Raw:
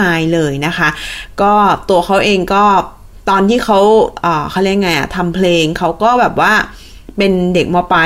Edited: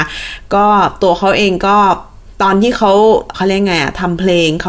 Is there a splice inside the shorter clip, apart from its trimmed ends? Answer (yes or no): yes